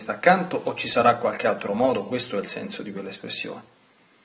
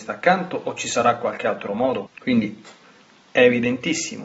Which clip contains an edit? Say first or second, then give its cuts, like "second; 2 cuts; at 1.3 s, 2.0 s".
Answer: second; 1 cut; at 2.1 s